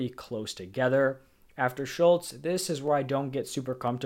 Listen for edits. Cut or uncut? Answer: uncut